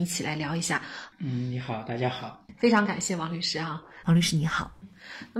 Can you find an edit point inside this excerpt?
yes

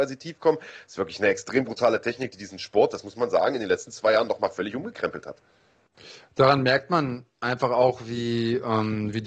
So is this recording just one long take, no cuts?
yes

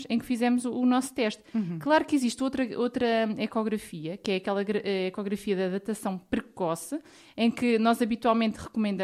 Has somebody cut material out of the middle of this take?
no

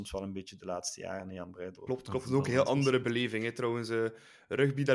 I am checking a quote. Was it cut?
yes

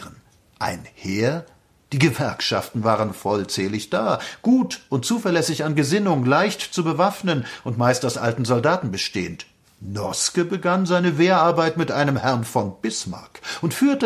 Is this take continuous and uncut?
yes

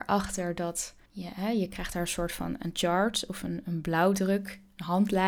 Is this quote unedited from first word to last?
no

